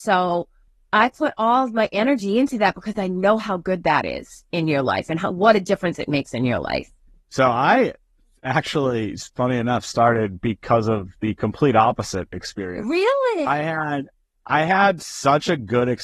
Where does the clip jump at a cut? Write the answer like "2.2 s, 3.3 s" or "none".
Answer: none